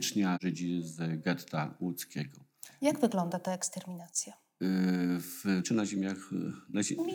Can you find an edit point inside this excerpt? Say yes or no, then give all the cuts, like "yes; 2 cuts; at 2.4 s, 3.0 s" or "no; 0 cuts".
yes; 1 cut; at 5.6 s